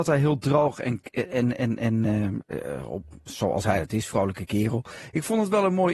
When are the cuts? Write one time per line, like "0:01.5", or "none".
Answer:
0:02.4